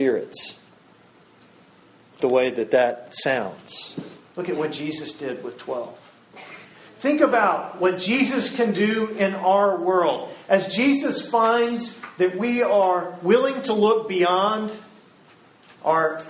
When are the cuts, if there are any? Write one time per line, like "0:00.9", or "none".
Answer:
0:02.2
0:04.3